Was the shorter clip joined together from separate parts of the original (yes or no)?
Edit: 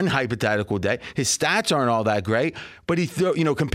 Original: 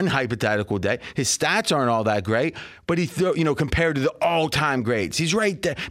no